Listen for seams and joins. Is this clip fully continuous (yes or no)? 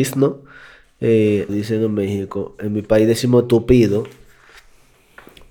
no